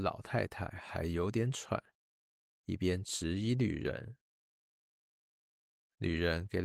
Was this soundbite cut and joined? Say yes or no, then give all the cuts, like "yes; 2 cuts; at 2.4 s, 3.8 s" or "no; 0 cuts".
no; 0 cuts